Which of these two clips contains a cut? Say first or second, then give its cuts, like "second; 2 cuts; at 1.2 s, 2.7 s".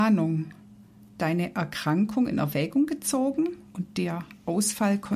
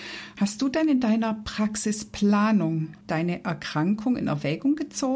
second; 1 cut; at 3.0 s